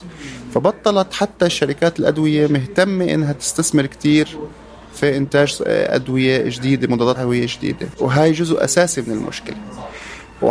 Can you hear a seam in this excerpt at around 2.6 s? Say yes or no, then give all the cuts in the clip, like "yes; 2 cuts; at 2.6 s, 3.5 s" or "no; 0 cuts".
no; 1 cut; at 7.2 s